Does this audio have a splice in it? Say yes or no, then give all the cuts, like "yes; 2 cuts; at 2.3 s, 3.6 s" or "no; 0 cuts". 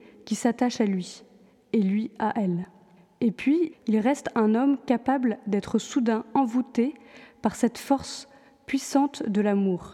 yes; 1 cut; at 3.7 s